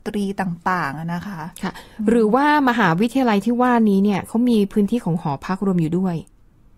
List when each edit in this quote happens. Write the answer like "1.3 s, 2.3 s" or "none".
none